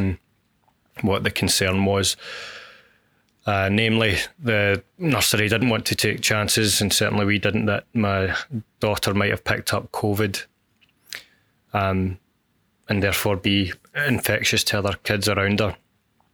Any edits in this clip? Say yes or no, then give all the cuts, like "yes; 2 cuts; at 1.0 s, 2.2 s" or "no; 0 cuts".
no; 0 cuts